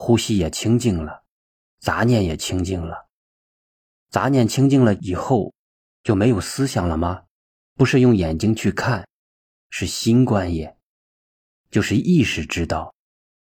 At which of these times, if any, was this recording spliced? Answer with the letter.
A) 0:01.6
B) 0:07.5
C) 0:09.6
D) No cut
B